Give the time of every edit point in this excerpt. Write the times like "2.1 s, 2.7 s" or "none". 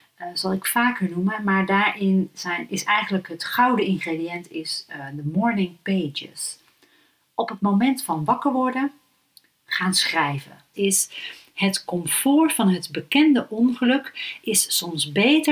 10.7 s